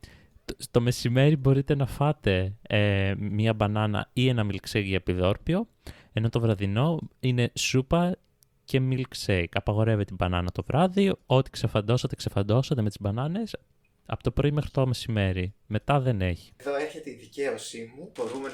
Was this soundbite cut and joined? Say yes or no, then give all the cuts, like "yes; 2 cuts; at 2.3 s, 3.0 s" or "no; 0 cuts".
no; 0 cuts